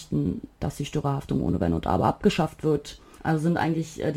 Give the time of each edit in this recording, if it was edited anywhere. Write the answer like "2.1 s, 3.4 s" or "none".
3.2 s